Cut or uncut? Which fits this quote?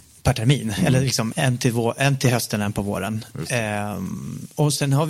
cut